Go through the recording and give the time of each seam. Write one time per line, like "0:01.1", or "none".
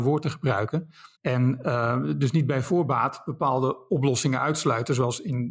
0:01.1